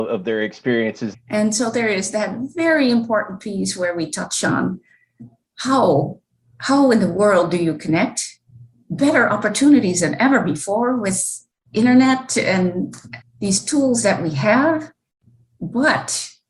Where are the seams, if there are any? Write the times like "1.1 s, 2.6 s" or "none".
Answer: 1.1 s, 13.2 s